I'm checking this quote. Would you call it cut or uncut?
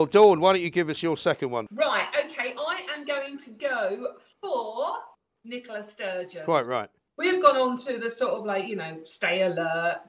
uncut